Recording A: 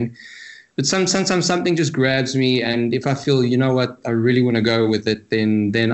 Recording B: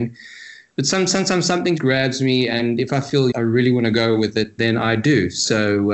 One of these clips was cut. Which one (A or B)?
B